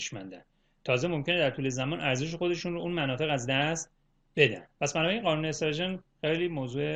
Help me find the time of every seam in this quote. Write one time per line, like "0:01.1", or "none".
0:04.7